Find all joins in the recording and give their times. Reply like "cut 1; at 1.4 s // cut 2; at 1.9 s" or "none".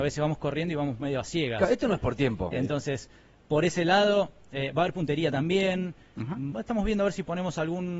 cut 1; at 2.5 s // cut 2; at 6.5 s